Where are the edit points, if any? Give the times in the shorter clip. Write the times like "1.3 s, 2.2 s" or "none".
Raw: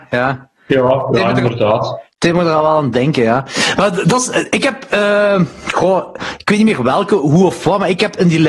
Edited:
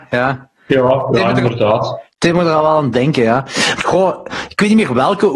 3.8 s